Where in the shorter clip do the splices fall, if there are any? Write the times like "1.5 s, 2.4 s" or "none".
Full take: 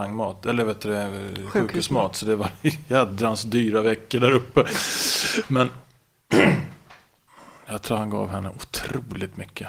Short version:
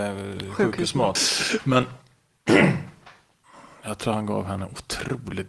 1.2 s